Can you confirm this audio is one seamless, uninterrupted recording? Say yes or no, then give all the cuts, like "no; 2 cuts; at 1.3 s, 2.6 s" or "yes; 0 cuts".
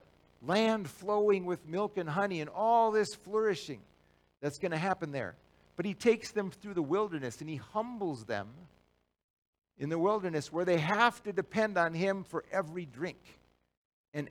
yes; 0 cuts